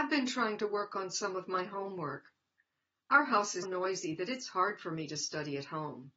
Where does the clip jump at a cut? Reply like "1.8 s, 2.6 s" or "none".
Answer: 3.6 s